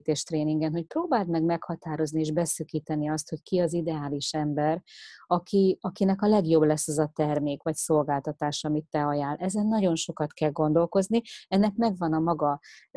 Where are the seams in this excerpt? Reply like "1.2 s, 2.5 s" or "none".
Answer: none